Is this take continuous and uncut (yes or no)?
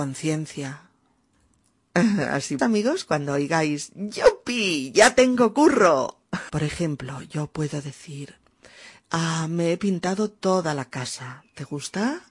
no